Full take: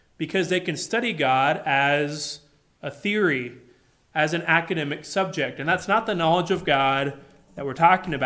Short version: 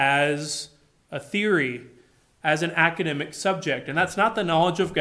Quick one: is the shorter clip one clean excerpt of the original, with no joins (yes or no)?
yes